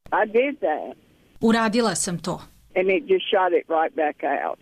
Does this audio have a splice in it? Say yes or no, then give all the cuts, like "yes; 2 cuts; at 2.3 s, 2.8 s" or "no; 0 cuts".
yes; 1 cut; at 2.7 s